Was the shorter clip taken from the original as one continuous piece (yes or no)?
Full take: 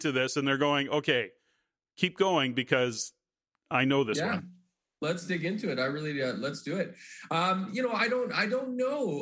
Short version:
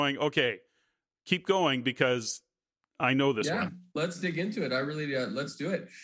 no